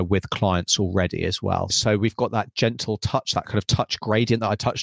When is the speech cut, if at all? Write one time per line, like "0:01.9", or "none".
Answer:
0:01.7